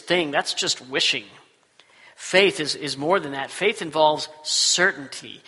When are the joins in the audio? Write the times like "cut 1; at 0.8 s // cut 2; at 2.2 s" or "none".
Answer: none